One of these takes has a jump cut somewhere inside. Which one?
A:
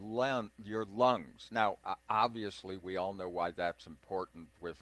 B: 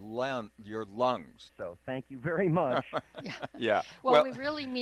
B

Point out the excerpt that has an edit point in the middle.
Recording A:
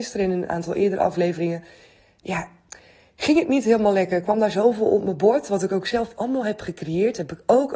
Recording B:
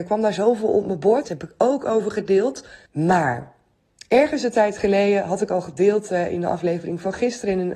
B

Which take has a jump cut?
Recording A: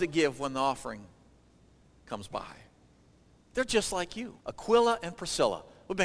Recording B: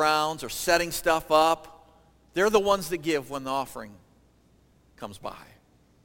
A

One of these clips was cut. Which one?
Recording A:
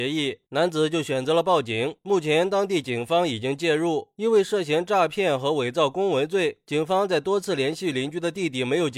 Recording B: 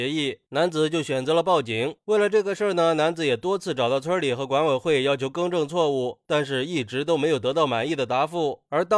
B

